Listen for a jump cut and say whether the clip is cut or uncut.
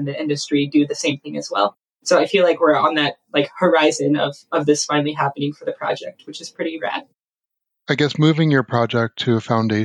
uncut